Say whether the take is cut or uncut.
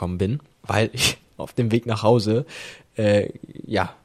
uncut